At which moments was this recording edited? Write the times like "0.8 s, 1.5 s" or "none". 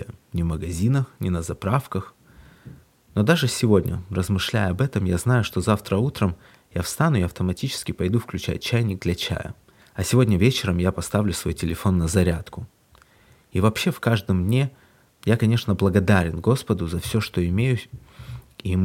9.8 s

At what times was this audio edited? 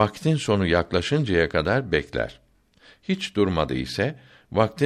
none

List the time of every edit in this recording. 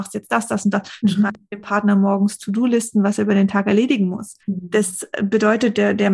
1.0 s, 4.4 s

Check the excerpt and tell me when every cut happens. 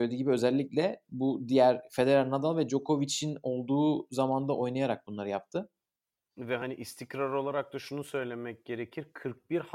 6.3 s

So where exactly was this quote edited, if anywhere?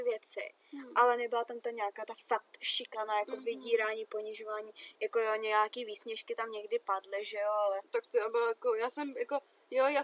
none

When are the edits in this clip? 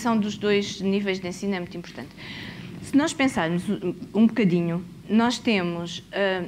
none

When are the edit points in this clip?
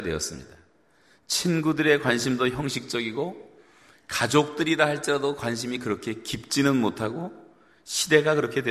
none

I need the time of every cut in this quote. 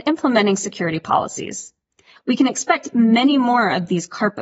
2.2 s

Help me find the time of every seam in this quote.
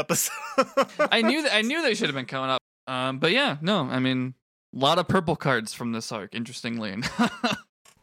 2.6 s

